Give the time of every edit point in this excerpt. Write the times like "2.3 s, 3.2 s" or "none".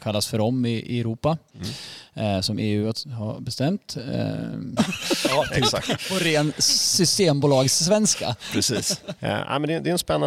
4.8 s, 9.2 s